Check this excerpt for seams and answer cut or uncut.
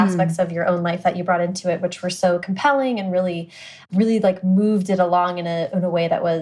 uncut